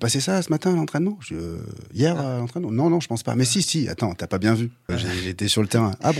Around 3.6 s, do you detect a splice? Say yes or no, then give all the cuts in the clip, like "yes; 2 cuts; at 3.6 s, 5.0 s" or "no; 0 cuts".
yes; 2 cuts; at 3.6 s, 4.9 s